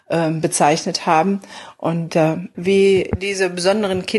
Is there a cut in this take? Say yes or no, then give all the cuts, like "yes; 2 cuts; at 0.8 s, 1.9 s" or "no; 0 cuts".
yes; 1 cut; at 2.5 s